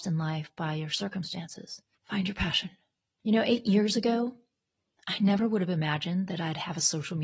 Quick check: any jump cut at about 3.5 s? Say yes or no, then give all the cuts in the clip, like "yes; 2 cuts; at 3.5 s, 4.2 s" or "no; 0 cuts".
no; 1 cut; at 2.0 s